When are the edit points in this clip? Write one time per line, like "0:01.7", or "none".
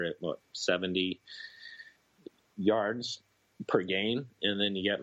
none